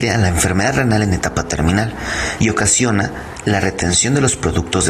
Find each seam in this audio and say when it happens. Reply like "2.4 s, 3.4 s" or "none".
2.4 s